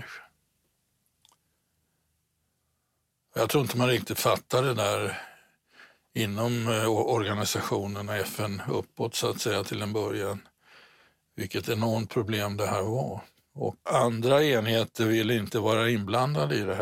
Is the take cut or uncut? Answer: cut